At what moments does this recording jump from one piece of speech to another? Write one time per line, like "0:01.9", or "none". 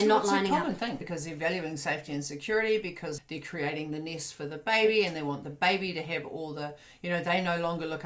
0:01.0
0:03.2